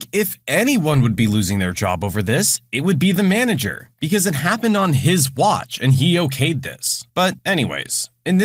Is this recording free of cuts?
yes; 0 cuts

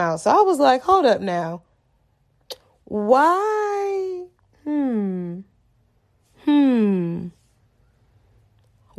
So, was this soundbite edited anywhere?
no; 0 cuts

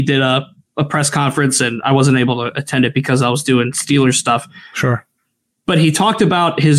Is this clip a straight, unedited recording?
yes; 0 cuts

